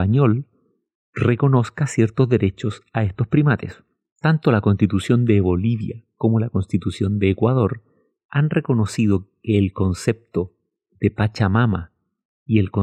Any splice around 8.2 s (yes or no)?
no